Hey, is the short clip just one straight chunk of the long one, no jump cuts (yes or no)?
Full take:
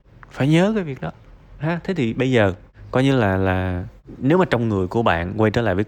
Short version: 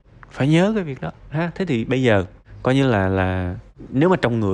no